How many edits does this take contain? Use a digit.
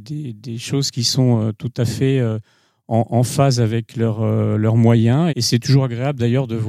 1